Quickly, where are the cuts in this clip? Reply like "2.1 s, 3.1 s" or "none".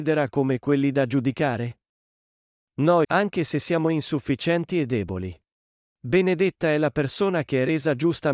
3.0 s, 5.9 s